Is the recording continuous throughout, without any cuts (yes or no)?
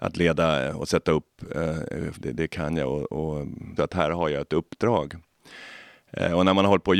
no